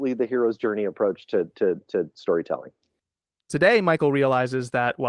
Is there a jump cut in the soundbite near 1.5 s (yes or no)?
no